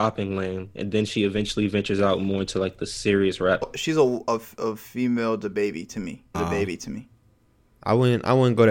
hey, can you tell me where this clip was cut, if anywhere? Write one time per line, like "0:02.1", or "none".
0:03.6
0:06.3